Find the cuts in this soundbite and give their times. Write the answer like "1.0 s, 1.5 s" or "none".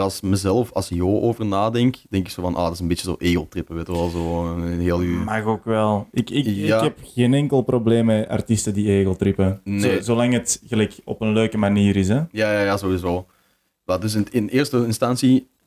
none